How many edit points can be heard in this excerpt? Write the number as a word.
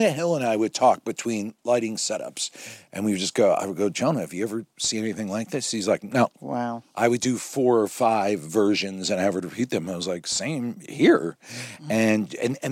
zero